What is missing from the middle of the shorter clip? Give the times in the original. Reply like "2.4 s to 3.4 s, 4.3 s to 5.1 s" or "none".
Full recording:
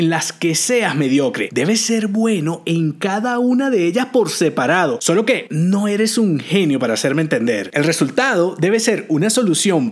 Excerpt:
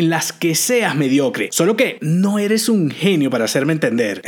1.5 s to 5.0 s